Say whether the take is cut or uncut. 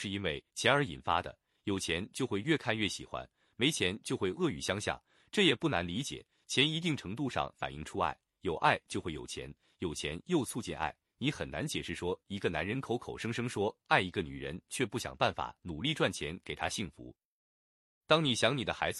uncut